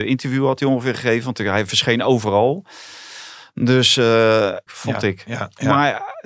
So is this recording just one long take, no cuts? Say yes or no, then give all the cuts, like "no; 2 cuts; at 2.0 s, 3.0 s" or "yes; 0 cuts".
no; 1 cut; at 4.7 s